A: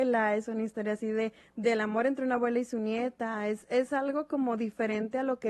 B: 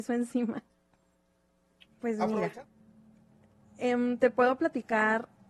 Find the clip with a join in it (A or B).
B